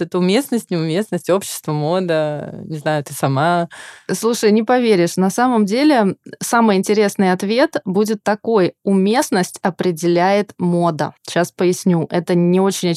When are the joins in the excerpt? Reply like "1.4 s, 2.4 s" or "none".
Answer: 11.2 s